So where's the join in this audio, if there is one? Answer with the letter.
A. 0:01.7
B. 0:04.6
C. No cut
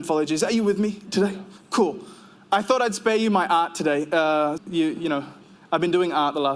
B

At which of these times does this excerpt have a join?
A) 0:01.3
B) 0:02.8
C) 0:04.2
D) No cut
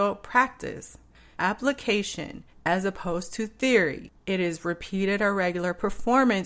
A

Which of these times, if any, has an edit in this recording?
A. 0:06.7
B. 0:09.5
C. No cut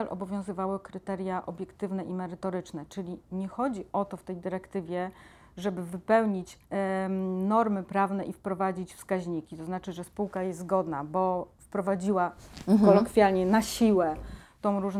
A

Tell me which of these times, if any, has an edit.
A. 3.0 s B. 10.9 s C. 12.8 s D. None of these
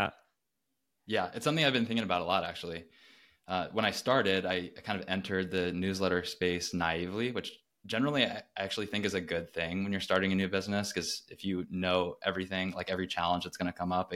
D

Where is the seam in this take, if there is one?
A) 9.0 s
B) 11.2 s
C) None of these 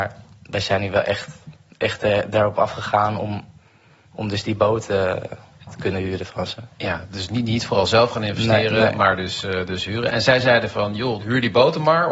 B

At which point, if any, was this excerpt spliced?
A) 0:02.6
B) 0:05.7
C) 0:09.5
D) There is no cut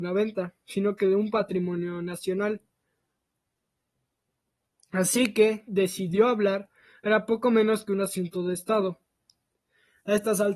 B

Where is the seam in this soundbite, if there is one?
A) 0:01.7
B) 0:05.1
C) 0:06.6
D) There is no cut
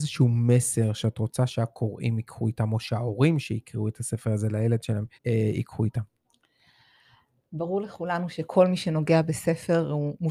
B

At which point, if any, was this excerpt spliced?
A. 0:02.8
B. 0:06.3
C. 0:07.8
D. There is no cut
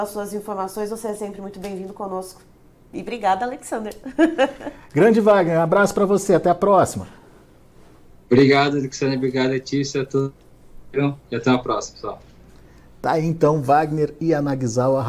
D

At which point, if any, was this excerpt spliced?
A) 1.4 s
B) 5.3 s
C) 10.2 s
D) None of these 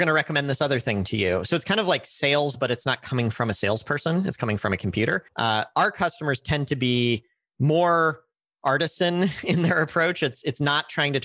B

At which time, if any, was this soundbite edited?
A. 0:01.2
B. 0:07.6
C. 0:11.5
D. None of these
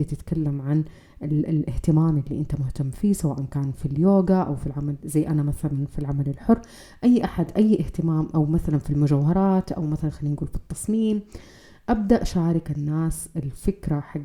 D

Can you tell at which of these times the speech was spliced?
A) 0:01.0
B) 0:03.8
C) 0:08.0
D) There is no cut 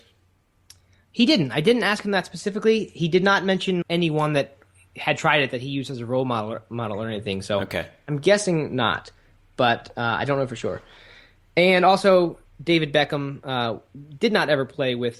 B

